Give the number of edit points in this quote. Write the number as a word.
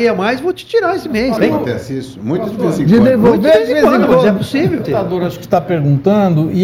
two